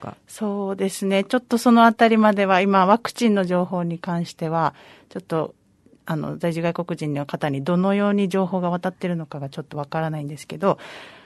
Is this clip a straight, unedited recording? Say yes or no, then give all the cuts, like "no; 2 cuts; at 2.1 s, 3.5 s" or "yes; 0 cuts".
yes; 0 cuts